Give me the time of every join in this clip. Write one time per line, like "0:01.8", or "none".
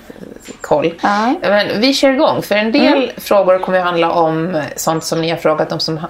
none